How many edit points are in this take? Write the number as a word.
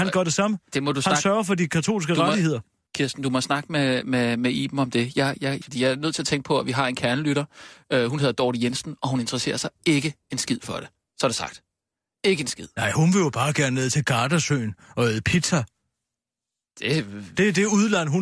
two